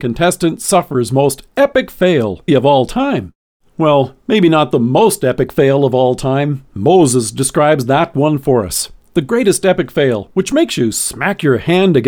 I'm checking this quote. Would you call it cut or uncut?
cut